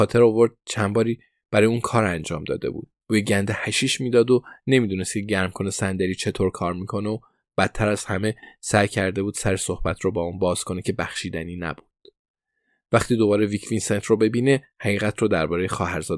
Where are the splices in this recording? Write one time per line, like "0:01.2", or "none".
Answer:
0:03.0